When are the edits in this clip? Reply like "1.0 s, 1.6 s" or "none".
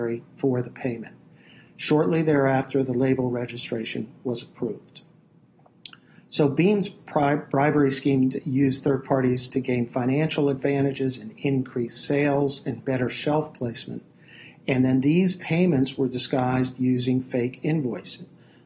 none

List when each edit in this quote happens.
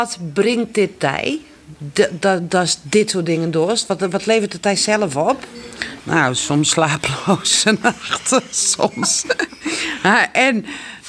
6.0 s

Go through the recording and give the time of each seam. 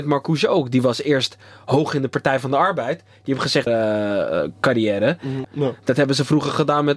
3.7 s, 5.4 s

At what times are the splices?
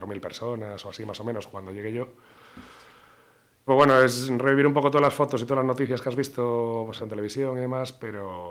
3.7 s, 7.0 s

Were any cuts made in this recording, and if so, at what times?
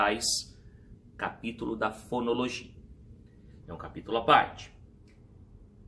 3.6 s

